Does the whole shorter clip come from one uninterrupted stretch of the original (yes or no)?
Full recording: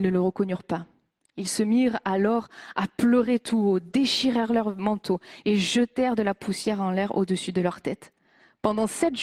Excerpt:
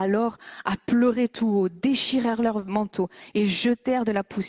yes